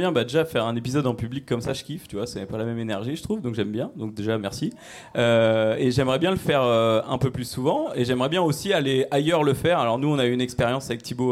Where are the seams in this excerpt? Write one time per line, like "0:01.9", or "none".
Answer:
none